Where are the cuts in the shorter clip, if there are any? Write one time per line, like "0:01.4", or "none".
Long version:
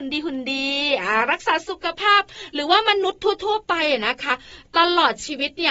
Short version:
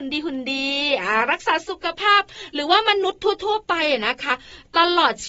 none